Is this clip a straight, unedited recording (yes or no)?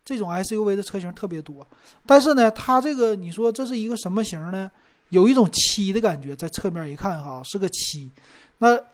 yes